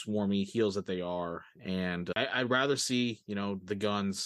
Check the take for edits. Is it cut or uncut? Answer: cut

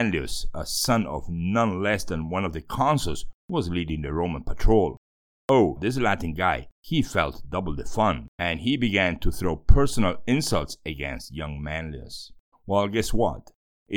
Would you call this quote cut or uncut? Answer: cut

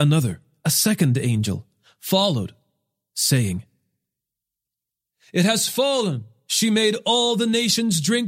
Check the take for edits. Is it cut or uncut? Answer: cut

